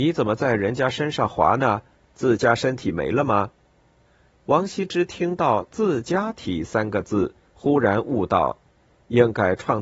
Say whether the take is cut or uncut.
uncut